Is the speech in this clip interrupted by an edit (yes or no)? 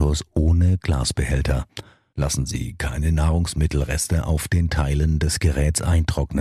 yes